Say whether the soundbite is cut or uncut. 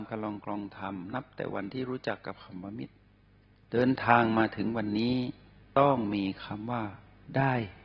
cut